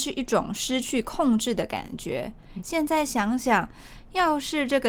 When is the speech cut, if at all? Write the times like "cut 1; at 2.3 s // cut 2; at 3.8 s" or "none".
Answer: cut 1; at 2.6 s